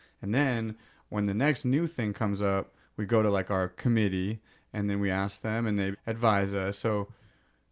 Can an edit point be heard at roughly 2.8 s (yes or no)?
yes